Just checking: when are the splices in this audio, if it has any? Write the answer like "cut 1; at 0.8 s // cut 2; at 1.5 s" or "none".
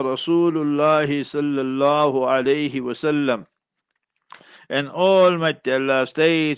cut 1; at 4.6 s